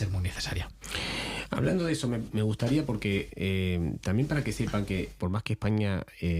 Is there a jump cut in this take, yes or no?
yes